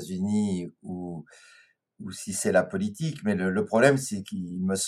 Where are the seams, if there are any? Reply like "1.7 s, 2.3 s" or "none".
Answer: none